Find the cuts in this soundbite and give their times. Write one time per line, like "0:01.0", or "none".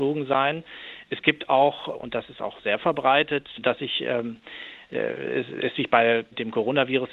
0:03.6